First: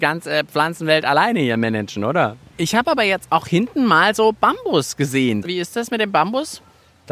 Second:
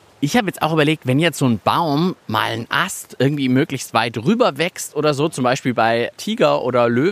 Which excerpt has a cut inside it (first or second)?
first